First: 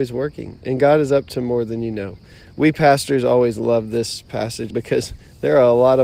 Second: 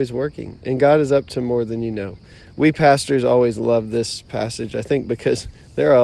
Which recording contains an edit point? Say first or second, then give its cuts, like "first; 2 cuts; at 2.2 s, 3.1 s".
first; 1 cut; at 4.7 s